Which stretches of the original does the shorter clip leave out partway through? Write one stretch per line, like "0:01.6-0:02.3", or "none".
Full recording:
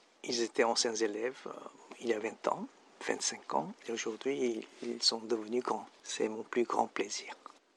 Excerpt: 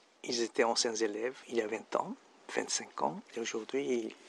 0:01.4-0:01.9